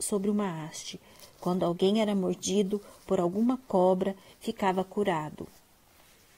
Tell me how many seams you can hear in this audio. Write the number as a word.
one